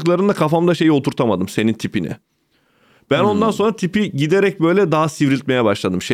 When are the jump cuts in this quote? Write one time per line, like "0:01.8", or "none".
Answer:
none